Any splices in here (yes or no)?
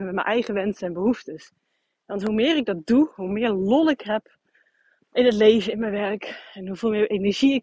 no